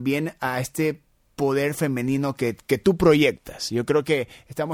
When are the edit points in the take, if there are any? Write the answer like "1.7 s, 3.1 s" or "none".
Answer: none